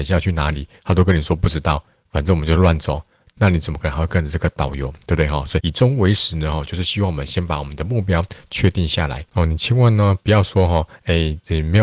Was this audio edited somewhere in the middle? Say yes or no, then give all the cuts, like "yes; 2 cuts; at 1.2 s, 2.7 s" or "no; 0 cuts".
yes; 1 cut; at 5.6 s